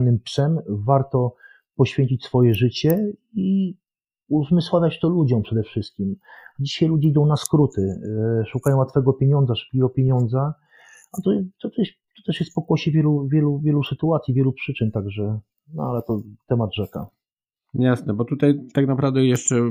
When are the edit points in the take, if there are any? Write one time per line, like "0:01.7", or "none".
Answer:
none